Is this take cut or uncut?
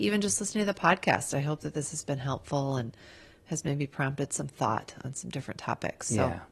uncut